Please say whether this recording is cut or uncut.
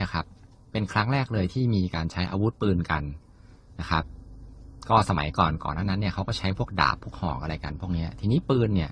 uncut